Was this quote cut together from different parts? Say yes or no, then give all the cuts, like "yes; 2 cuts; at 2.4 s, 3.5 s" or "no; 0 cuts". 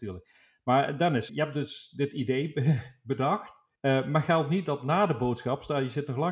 yes; 2 cuts; at 1.3 s, 3.8 s